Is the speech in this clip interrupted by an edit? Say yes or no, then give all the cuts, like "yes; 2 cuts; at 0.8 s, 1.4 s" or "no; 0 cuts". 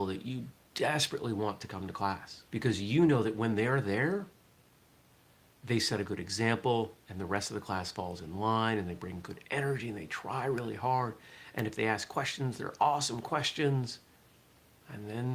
yes; 1 cut; at 2.5 s